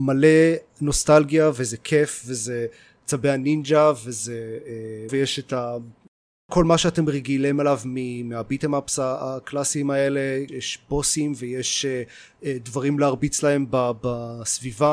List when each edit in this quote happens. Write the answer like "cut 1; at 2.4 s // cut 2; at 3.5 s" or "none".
cut 1; at 5.1 s // cut 2; at 10.5 s